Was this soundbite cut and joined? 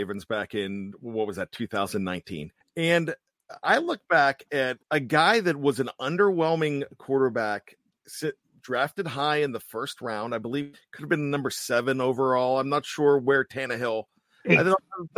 yes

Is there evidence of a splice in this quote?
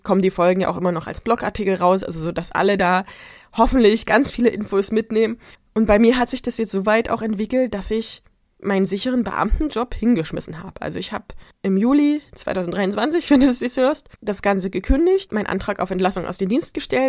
yes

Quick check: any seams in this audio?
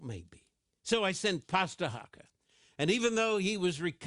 no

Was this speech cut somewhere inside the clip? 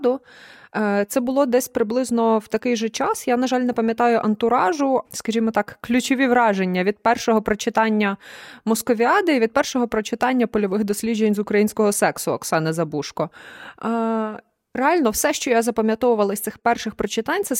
yes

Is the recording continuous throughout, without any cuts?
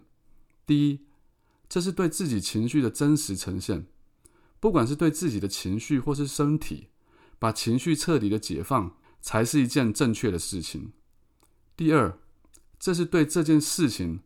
yes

